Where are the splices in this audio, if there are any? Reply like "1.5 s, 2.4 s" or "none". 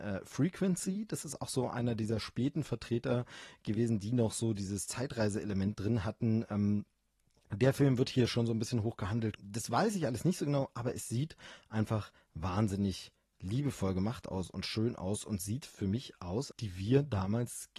9.4 s, 16.5 s